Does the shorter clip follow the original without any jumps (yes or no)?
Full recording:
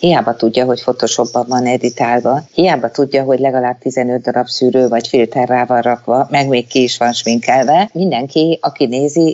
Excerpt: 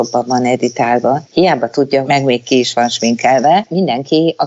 no